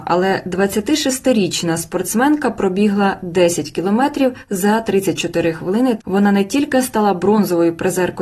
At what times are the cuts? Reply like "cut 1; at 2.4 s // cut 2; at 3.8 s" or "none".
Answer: cut 1; at 6.0 s